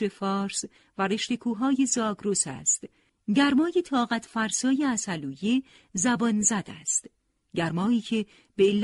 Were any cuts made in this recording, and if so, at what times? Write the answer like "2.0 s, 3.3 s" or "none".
none

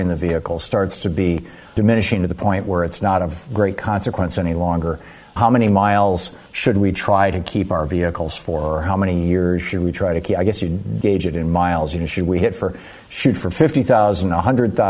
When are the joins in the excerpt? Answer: 6.5 s

